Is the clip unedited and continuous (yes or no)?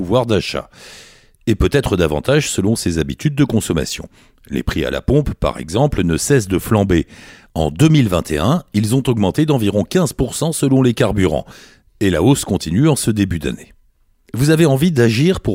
yes